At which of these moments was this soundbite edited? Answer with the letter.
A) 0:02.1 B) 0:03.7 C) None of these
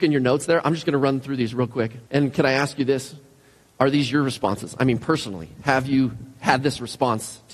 A